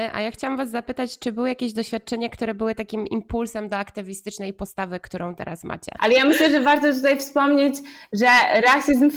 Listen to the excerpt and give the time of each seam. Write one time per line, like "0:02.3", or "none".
0:06.0